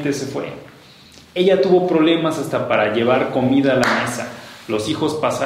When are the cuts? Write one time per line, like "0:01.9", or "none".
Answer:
none